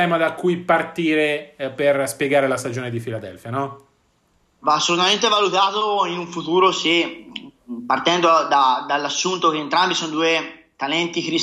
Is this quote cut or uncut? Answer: uncut